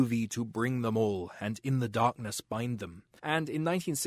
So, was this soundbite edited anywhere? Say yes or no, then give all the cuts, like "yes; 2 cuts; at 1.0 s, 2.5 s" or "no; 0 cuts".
yes; 1 cut; at 3.2 s